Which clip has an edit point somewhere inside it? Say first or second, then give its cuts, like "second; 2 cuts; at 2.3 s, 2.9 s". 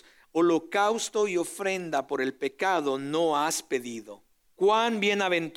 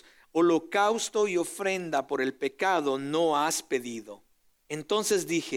first; 1 cut; at 4.4 s